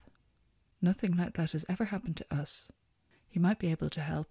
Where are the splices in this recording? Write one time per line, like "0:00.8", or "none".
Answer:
0:03.1

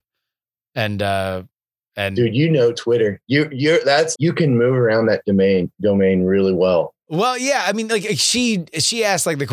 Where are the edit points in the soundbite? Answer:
0:04.1

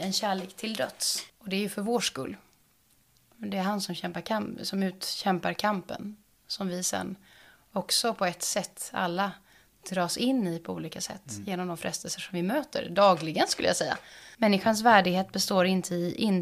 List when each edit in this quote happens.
0:01.3
0:14.3

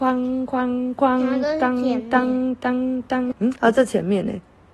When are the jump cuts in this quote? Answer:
0:03.3

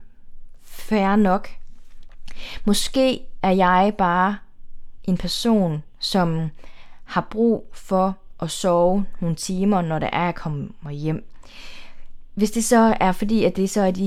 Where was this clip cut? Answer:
none

